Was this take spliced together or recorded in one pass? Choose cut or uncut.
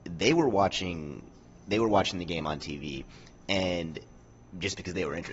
uncut